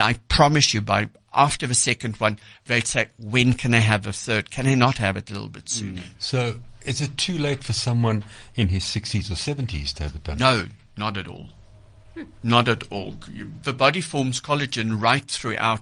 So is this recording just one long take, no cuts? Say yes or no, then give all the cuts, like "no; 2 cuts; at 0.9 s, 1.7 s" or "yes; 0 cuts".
yes; 0 cuts